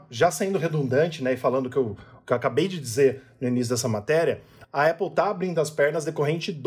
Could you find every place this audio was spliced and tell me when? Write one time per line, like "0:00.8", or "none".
none